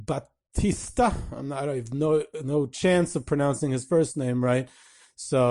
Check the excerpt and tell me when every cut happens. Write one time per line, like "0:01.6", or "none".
none